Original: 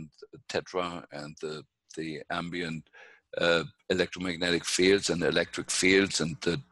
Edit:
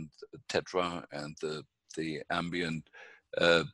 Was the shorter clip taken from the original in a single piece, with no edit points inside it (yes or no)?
yes